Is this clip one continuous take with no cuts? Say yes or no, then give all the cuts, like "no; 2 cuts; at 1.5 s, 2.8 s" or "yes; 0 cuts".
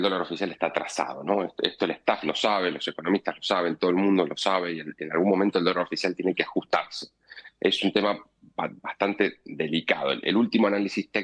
yes; 0 cuts